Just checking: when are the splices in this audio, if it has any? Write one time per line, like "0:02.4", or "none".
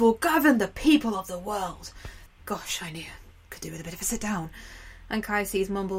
0:02.3